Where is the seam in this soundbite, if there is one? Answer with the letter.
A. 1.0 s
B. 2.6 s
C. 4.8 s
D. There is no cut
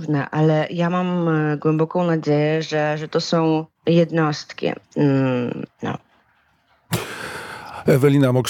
D